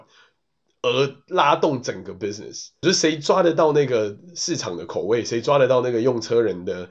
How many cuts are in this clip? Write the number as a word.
one